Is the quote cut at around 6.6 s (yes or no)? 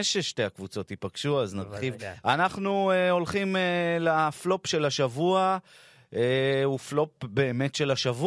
no